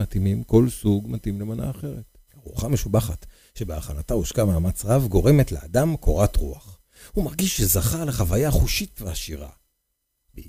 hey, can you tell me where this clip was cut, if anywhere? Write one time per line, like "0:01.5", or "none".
0:02.3